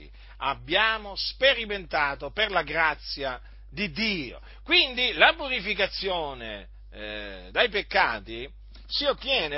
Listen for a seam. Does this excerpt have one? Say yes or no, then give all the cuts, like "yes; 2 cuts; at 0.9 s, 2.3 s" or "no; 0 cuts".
no; 0 cuts